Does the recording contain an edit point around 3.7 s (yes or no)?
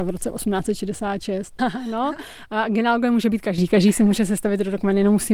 no